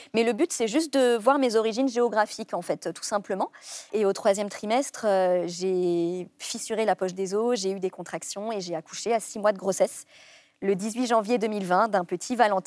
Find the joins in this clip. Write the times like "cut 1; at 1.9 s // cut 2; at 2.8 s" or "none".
cut 1; at 3.9 s